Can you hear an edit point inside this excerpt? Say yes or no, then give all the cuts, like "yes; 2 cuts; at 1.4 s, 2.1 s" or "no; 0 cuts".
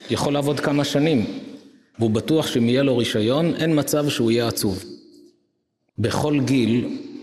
yes; 2 cuts; at 1.9 s, 5.9 s